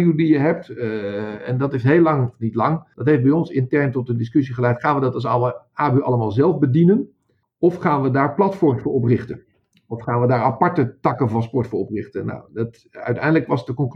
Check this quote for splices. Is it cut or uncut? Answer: uncut